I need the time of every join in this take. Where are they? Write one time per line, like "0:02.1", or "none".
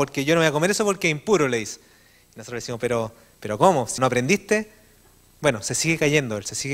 0:04.0

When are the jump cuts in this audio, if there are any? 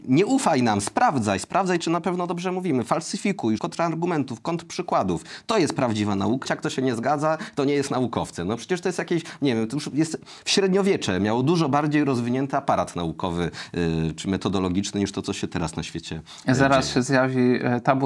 0:03.6
0:06.4

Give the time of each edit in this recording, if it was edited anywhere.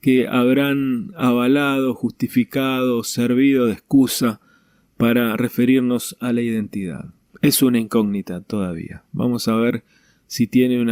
0:07.3

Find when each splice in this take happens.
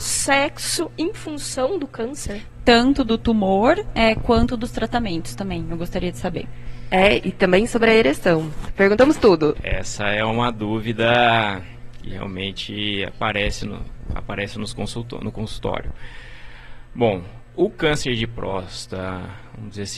none

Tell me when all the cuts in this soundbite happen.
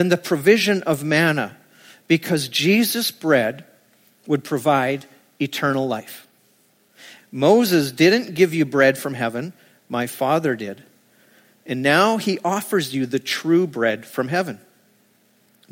0:07.2

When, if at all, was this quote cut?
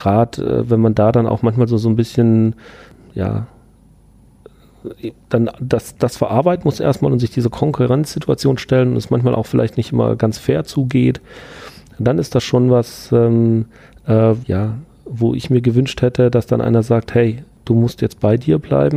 0:14.4

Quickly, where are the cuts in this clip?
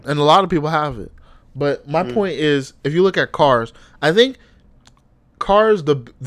none

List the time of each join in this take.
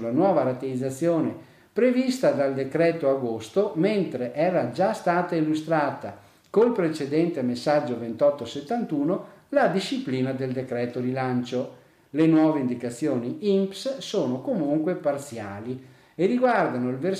none

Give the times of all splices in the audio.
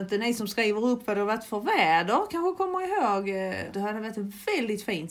0:03.7

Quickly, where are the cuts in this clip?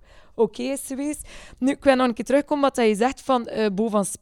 none

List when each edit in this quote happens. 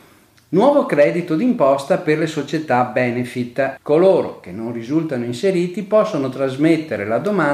0:03.8

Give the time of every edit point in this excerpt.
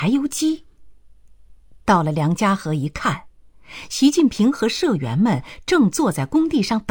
none

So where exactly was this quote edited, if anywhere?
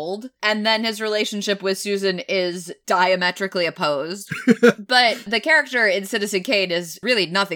0:04.3

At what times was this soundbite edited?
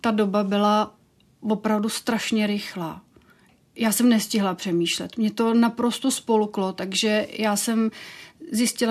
none

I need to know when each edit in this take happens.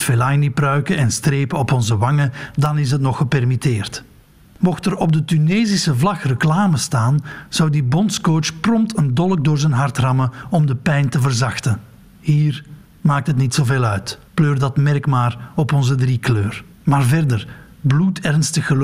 0:14.3
0:16.7

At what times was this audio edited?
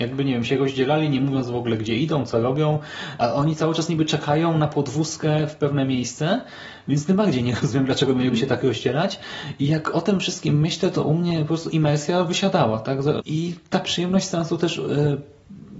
0:13.2

